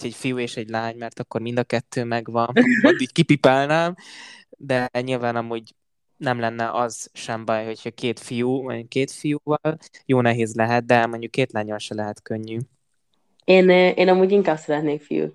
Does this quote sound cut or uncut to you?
uncut